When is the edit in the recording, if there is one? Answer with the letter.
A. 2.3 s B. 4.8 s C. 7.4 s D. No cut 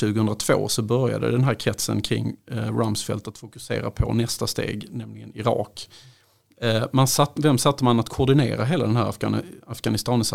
C